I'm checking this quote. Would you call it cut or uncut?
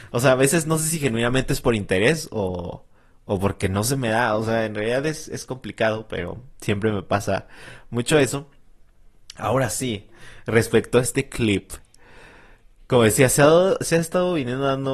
uncut